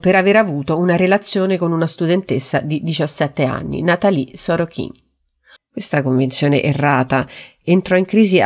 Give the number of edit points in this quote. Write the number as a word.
one